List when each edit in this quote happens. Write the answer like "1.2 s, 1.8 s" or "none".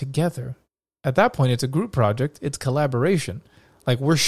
none